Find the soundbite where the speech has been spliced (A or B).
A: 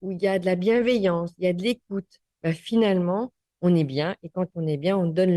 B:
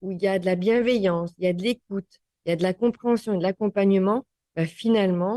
A